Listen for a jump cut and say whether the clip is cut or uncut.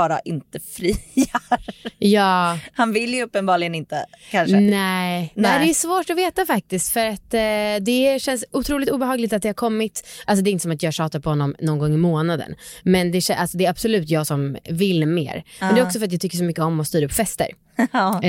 uncut